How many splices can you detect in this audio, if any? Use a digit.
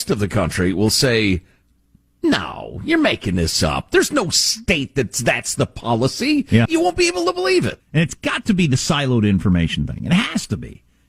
2